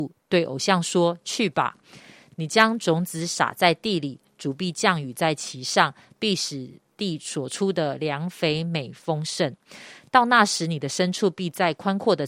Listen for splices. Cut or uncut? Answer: uncut